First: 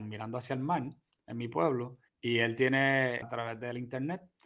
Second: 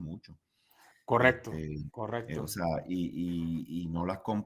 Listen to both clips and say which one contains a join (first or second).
first